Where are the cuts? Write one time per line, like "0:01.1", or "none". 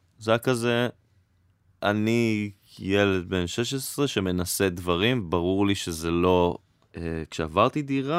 0:06.9